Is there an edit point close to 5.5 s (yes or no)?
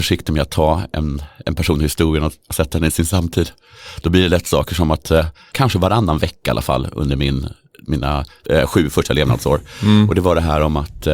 yes